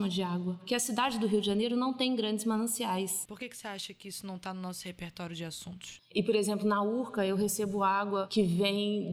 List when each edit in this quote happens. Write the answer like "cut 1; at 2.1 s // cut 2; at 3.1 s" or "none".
cut 1; at 3.3 s // cut 2; at 6.0 s

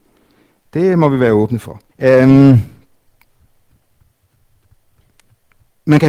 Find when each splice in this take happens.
cut 1; at 1.9 s

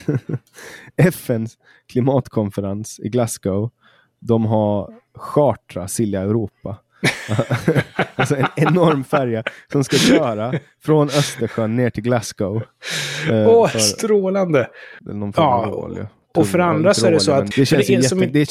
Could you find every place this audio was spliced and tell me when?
cut 1; at 15.0 s // cut 2; at 17.5 s

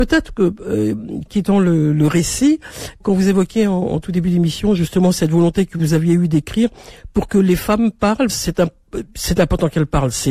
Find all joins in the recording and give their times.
cut 1; at 1.3 s // cut 2; at 3.0 s // cut 3; at 8.3 s

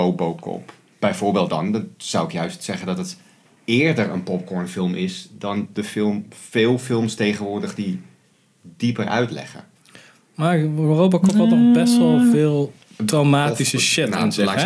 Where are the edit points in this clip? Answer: none

